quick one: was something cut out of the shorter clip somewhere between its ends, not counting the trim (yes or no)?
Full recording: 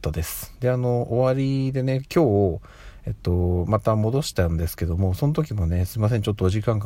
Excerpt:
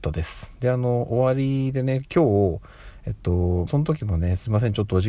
yes